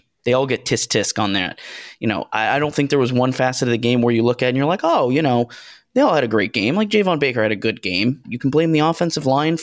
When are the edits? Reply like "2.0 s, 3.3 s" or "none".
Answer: 8.2 s